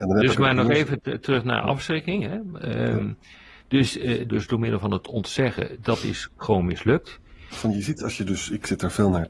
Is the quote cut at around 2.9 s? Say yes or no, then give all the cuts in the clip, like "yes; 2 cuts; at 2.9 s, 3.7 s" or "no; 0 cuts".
no; 2 cuts; at 4.3 s, 7.5 s